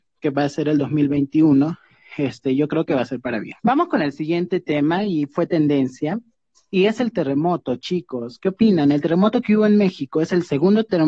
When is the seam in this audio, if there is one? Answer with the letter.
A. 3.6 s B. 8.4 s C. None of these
A